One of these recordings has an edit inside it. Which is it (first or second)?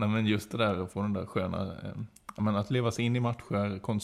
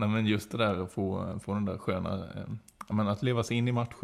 first